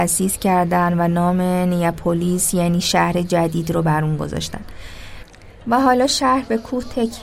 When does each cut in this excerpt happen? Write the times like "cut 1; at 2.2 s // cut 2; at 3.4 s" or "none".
cut 1; at 5.6 s